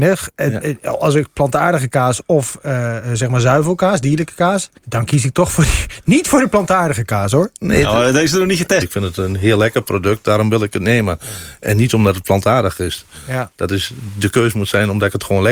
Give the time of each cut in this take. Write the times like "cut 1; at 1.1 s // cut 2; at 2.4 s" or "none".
cut 1; at 4.8 s // cut 2; at 8.8 s